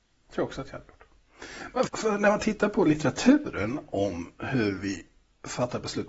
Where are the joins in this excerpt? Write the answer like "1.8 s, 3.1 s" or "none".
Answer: 1.9 s